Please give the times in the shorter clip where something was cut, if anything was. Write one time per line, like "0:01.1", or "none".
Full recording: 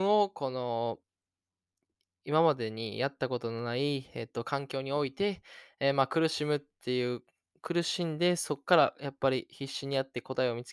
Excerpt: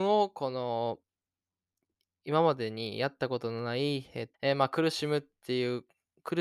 0:04.3